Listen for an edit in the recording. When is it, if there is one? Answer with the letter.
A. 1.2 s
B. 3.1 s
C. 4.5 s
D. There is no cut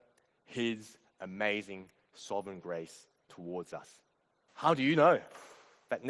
C